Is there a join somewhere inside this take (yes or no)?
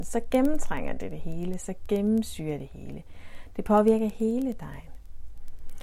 no